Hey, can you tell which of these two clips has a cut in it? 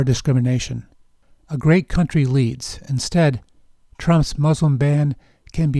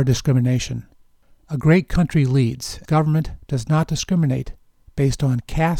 second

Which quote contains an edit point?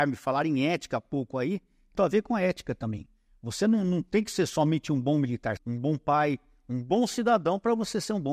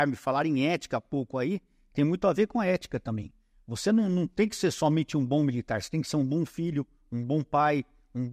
first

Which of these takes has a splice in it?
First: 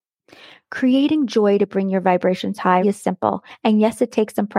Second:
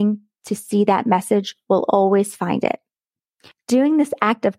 first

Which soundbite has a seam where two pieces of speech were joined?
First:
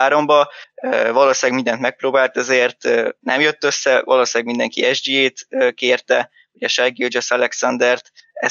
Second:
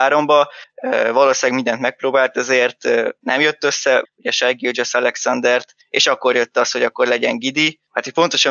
second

